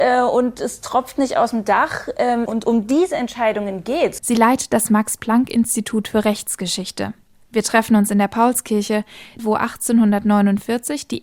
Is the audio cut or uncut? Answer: cut